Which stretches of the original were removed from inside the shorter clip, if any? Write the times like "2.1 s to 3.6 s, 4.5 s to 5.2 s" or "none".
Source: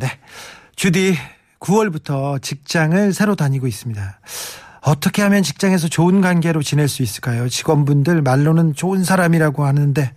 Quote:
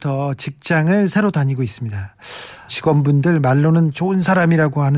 4.7 s to 7.5 s